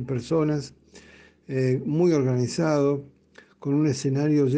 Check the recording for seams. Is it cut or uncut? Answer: uncut